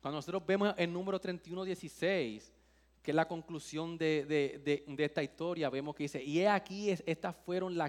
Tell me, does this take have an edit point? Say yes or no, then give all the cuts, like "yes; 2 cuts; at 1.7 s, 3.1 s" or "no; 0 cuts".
no; 0 cuts